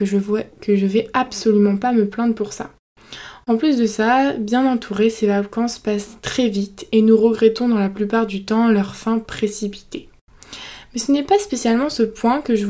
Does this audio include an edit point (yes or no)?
no